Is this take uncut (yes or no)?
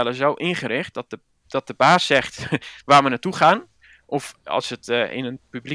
yes